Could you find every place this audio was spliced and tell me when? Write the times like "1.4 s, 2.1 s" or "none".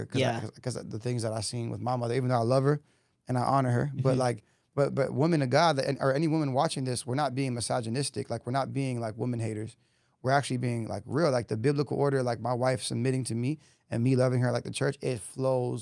none